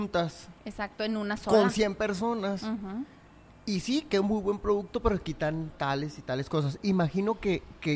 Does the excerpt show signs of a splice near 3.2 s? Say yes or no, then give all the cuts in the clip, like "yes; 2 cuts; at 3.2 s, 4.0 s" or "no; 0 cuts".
no; 0 cuts